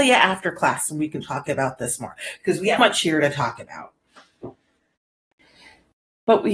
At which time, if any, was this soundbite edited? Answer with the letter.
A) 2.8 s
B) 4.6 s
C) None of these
A